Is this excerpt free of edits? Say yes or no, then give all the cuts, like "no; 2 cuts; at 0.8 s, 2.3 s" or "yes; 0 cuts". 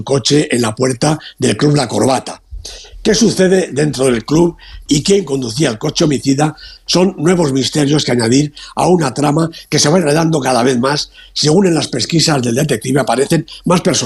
no; 1 cut; at 4.9 s